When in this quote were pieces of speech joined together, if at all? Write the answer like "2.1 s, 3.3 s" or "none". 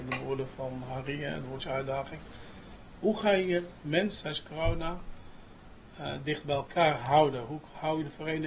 none